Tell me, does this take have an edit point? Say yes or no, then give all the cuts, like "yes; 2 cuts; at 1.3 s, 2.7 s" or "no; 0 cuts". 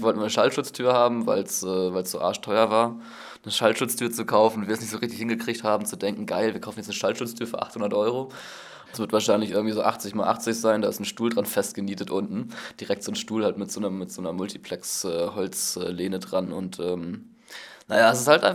yes; 1 cut; at 8.9 s